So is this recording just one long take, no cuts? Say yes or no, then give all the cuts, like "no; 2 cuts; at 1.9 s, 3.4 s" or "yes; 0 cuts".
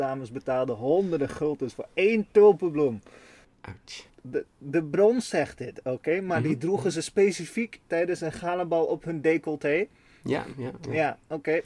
no; 2 cuts; at 4.1 s, 10.5 s